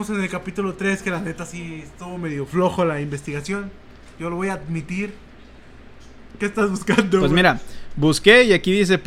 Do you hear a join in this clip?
no; 0 cuts

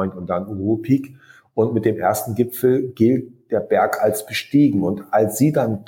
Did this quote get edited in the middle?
no; 0 cuts

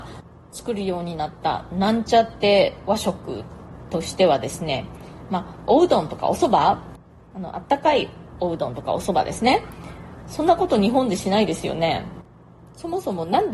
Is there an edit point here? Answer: yes; 1 cut; at 10.2 s

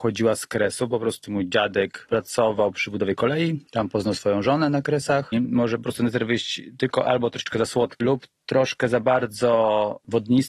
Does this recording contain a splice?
yes; 3 cuts; at 1.2 s, 5.3 s, 8.0 s

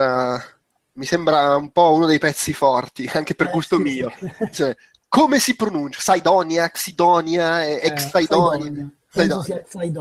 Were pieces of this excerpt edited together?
yes; 2 cuts; at 3.1 s, 4.5 s

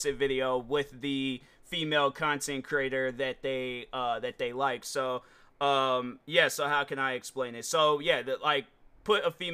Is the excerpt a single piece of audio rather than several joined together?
yes; 0 cuts

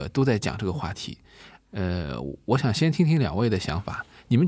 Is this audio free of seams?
yes; 0 cuts

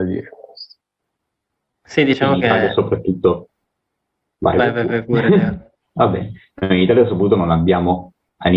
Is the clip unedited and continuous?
yes; 0 cuts

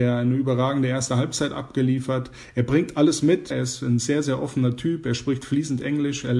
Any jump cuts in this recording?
yes; 1 cut; at 3.5 s

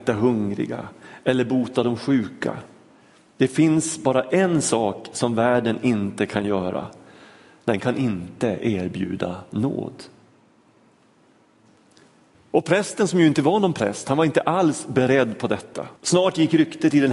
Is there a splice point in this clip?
yes; 2 cuts; at 12.3 s, 16.0 s

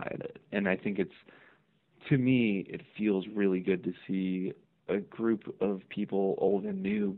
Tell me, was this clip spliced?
no; 0 cuts

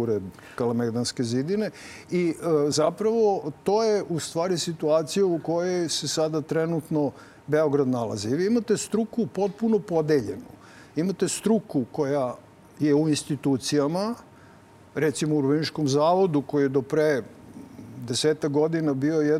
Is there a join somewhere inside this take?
no; 0 cuts

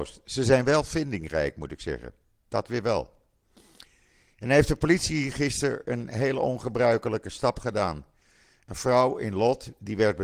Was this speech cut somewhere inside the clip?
no; 0 cuts

